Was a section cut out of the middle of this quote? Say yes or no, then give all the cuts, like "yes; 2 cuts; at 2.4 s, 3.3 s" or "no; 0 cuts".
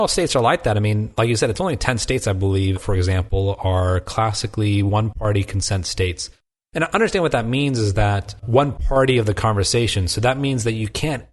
yes; 1 cut; at 2.7 s